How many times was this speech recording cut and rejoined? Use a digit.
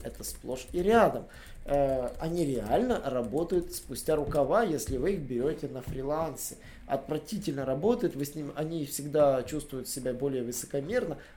0